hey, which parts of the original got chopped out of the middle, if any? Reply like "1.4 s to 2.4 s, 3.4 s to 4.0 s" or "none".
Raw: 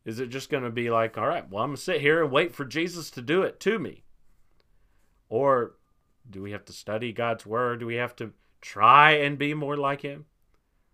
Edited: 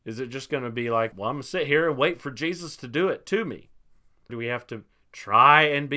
1.1 s to 1.5 s, 4.6 s to 7.8 s